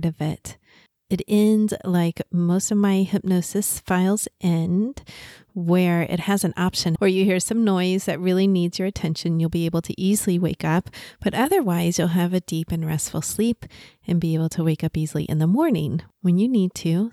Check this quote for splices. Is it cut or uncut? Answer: cut